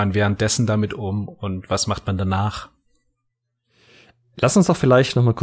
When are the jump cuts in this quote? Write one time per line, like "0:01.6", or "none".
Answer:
none